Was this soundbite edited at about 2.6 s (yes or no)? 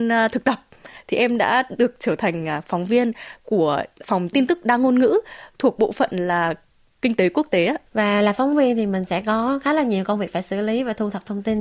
no